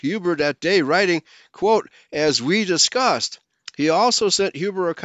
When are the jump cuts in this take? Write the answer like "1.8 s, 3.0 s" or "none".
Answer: none